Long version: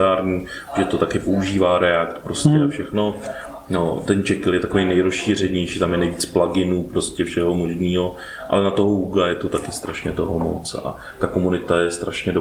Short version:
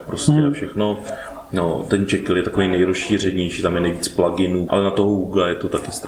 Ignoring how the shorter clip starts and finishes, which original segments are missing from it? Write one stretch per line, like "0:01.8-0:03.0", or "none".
0:06.8-0:08.5